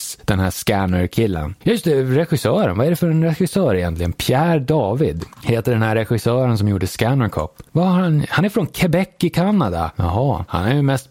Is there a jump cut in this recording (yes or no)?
yes